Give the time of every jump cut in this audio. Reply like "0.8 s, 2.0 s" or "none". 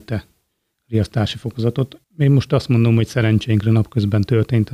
2.0 s